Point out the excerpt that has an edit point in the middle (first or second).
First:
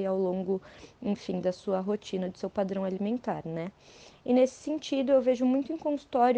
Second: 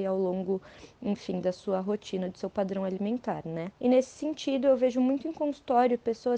second